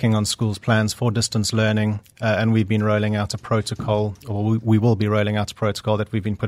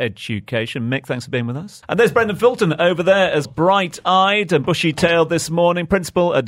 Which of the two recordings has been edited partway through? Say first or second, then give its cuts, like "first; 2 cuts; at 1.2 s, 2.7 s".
second; 2 cuts; at 1.8 s, 3.4 s